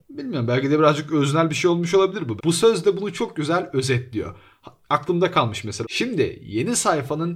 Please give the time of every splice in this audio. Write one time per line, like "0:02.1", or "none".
0:02.4
0:05.8